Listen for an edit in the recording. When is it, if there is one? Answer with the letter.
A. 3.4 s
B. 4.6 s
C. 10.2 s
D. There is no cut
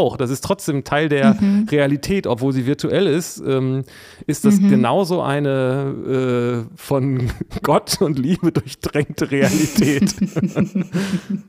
D